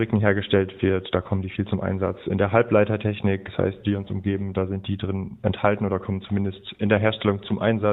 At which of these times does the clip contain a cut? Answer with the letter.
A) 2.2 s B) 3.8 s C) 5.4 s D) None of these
B